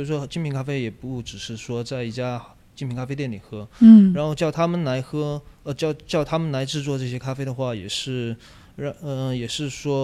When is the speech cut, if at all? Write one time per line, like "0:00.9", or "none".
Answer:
none